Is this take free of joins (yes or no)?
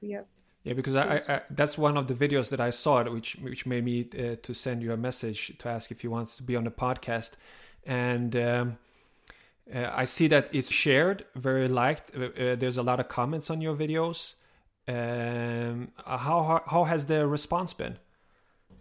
no